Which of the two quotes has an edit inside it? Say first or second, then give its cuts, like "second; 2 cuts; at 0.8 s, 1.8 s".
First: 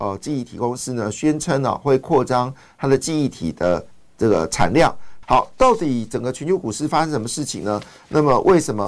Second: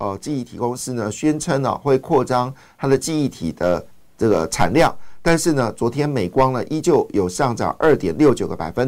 first; 1 cut; at 5.2 s